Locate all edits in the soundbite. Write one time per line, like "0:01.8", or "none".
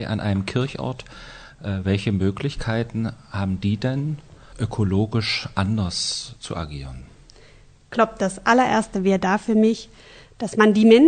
0:04.5